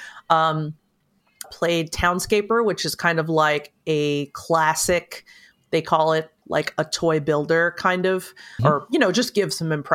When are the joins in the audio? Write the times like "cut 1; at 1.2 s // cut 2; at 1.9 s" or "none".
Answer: cut 1; at 1.4 s // cut 2; at 6.4 s // cut 3; at 8.6 s